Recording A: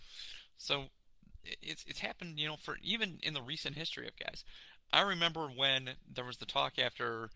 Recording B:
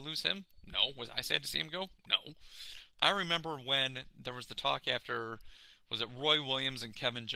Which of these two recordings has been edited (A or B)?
B